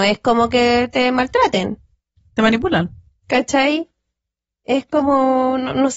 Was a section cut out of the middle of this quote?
no; 0 cuts

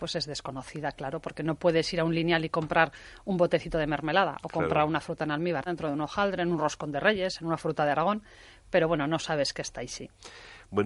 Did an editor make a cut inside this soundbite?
yes; 1 cut; at 5.7 s

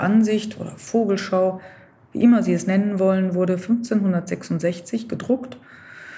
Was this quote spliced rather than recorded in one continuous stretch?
no; 0 cuts

